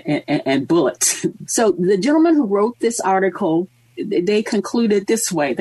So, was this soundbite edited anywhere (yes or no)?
yes